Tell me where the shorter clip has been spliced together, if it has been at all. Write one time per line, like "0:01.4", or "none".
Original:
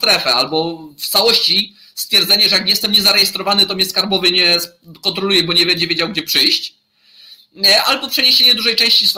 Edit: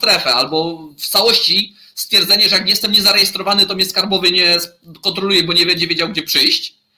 none